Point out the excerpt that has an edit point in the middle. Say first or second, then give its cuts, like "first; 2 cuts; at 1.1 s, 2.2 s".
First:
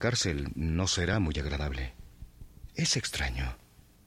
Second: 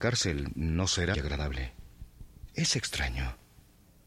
second; 1 cut; at 1.1 s